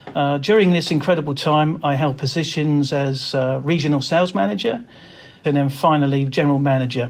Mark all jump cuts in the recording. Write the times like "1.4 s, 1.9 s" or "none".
5.4 s